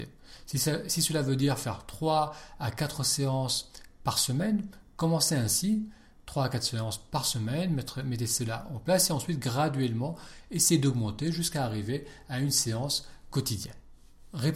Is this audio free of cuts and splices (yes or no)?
yes